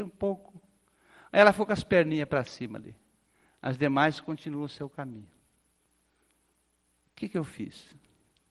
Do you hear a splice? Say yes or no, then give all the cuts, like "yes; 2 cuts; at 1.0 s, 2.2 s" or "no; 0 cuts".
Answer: no; 0 cuts